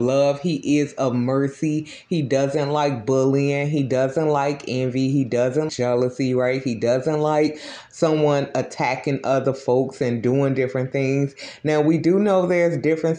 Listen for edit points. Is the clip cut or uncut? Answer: cut